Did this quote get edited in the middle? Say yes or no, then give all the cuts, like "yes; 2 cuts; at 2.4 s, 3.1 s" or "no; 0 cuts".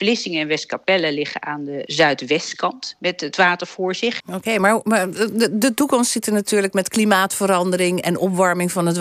yes; 1 cut; at 4.2 s